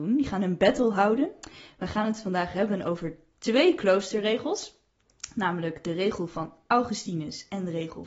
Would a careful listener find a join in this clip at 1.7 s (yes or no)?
no